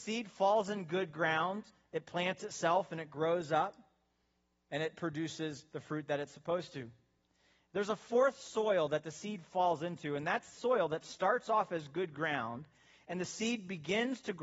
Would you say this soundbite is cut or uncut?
uncut